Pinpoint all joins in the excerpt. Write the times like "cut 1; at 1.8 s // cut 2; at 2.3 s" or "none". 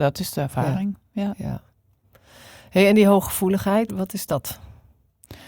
cut 1; at 3.9 s